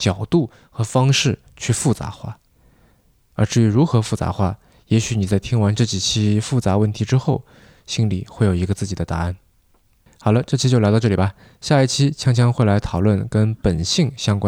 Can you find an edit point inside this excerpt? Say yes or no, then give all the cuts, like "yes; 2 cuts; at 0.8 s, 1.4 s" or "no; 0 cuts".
no; 0 cuts